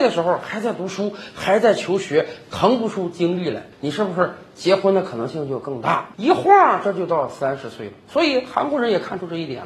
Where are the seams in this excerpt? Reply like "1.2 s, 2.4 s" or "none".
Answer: 3.7 s, 6.1 s